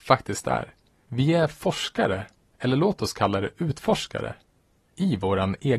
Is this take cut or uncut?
cut